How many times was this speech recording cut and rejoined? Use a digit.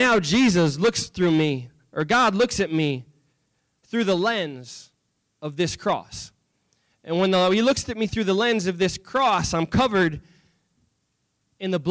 0